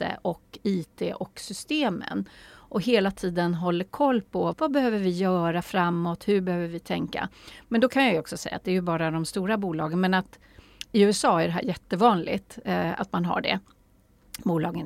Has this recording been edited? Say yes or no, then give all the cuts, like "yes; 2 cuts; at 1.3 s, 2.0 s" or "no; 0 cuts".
yes; 1 cut; at 4.5 s